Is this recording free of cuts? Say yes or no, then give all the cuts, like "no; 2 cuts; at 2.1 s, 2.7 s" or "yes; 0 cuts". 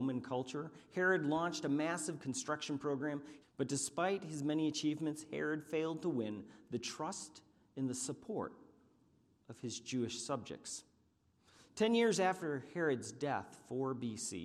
no; 1 cut; at 3.4 s